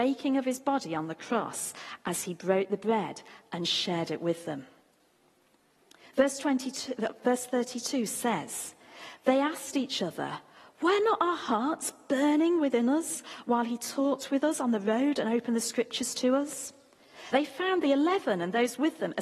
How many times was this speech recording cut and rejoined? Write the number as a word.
one